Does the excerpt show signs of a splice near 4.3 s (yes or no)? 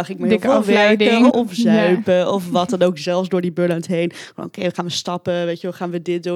no